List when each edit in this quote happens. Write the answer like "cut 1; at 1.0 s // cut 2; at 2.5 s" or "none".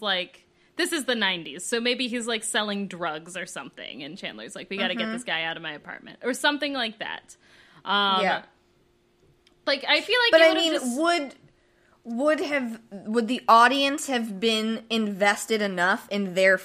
none